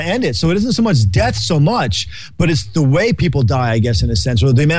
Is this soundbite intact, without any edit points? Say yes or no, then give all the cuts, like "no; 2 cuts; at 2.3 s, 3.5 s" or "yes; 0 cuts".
yes; 0 cuts